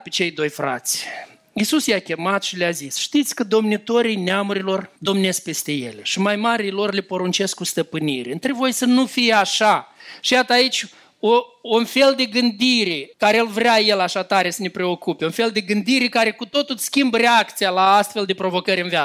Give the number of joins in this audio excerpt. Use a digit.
2